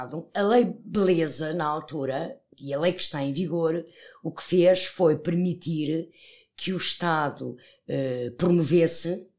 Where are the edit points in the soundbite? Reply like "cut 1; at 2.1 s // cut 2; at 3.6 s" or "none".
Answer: none